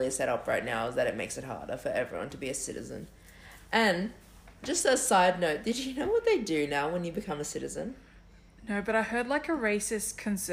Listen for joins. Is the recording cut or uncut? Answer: uncut